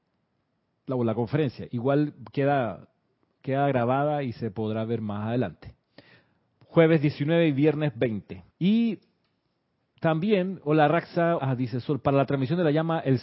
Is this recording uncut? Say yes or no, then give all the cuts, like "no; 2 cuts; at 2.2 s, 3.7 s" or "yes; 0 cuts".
no; 2 cuts; at 8.5 s, 11.4 s